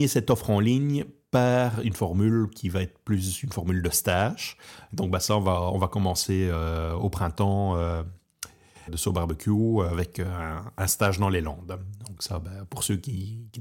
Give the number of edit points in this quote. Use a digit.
2